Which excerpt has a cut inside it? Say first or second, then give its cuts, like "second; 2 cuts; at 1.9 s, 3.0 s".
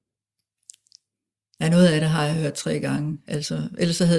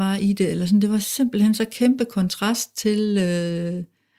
first; 1 cut; at 3.2 s